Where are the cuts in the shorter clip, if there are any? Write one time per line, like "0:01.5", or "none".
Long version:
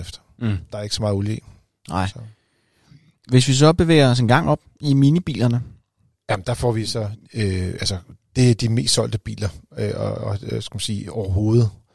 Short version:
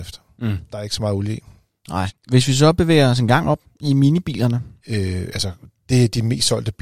0:02.1
0:04.8